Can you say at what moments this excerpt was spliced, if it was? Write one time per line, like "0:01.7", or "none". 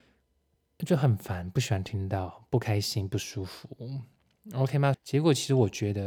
0:04.9